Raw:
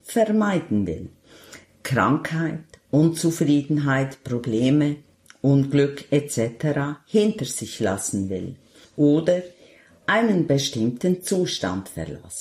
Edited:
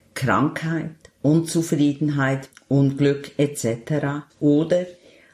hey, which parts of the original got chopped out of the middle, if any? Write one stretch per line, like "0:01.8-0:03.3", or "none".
0:04.2-0:05.2
0:07.0-0:08.9

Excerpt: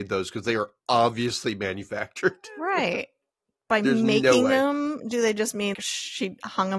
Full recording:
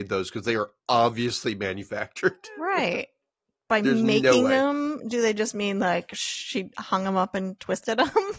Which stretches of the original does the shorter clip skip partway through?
0:05.7-0:06.1

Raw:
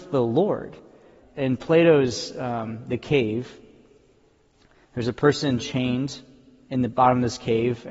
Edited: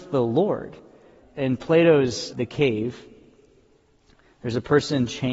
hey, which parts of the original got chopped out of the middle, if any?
0:02.3-0:02.8

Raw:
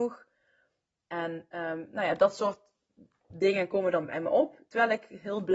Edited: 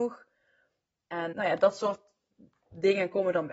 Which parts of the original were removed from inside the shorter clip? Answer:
0:01.3-0:01.9

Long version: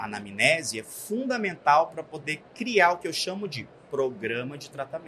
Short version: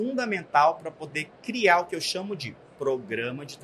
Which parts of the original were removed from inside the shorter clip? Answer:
none

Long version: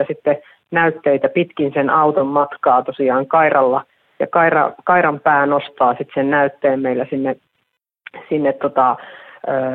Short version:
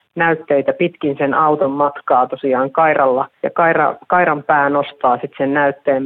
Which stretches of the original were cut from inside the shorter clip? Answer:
0:03.9-0:04.1

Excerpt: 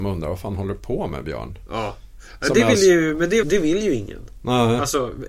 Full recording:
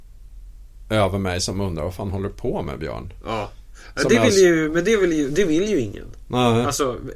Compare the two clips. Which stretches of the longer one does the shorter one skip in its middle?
0:05.0-0:05.3

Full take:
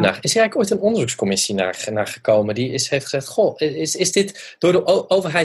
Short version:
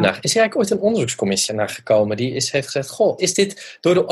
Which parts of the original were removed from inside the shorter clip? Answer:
0:01.5-0:01.9
0:03.6-0:04.0

